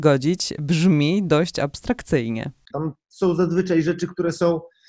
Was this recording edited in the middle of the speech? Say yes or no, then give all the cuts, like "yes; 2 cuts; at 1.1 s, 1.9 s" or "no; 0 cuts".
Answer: yes; 1 cut; at 2.7 s